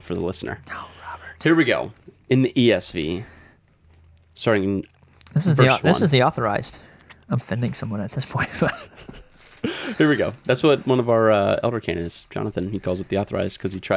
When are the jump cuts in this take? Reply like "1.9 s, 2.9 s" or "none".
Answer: 7.4 s